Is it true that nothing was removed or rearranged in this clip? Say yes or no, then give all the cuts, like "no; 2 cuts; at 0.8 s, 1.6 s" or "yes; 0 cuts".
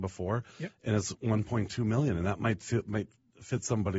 yes; 0 cuts